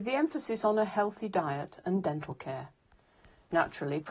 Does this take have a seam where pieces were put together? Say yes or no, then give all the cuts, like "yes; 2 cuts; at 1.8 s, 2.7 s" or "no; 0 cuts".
no; 0 cuts